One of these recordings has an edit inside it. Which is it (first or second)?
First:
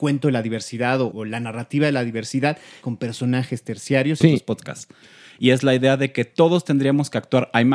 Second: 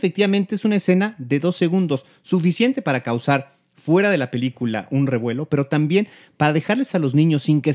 first